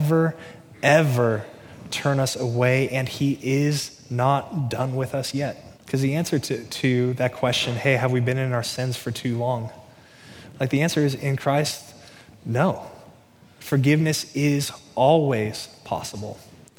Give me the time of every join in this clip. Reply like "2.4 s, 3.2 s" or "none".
5.7 s